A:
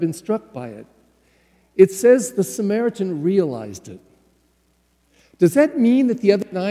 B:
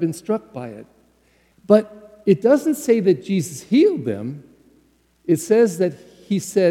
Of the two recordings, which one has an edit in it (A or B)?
B